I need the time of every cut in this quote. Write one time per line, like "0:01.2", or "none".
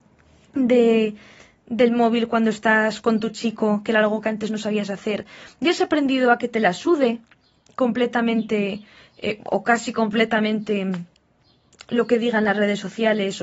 none